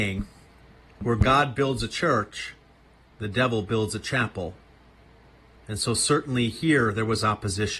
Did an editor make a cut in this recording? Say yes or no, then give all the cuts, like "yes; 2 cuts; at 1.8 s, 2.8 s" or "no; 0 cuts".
yes; 1 cut; at 5.6 s